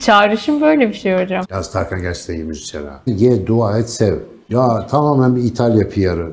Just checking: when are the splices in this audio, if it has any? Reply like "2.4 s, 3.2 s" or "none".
1.4 s, 3.1 s, 4.5 s